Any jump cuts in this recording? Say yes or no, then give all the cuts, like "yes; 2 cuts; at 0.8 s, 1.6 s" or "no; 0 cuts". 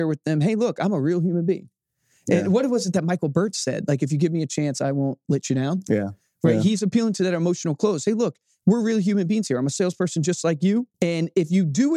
yes; 1 cut; at 10.9 s